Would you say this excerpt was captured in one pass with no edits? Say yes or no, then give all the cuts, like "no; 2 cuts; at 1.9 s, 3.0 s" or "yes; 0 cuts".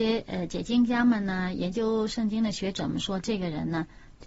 yes; 0 cuts